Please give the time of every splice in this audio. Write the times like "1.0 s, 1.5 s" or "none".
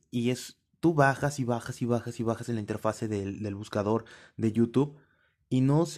none